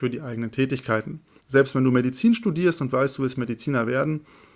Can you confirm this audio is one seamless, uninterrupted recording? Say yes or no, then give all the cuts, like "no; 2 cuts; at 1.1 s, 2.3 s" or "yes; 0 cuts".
no; 1 cut; at 1.4 s